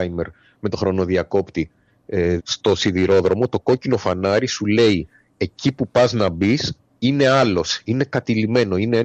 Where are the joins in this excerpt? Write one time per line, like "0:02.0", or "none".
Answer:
0:02.4